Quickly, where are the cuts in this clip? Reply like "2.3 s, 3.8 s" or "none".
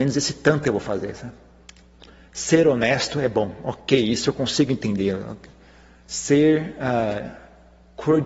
none